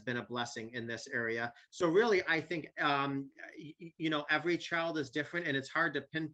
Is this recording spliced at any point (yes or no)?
no